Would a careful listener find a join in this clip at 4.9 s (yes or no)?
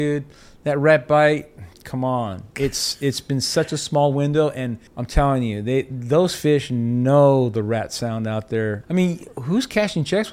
yes